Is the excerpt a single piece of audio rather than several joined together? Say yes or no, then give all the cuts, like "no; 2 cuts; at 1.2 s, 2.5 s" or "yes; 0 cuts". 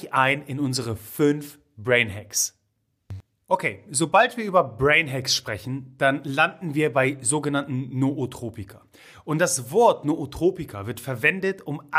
yes; 0 cuts